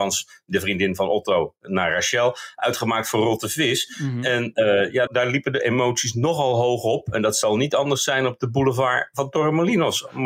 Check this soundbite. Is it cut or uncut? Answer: cut